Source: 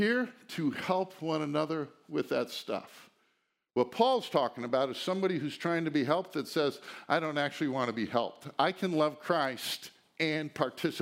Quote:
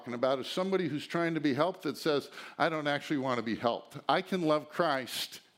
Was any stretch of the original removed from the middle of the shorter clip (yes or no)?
no